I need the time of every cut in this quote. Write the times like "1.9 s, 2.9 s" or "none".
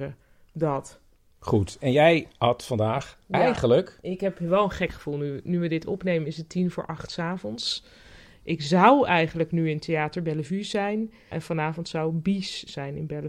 11.3 s